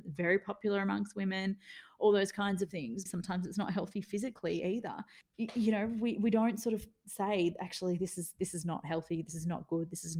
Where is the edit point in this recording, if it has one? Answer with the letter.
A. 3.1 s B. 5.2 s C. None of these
A